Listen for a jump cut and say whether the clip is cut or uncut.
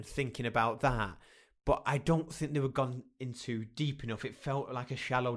uncut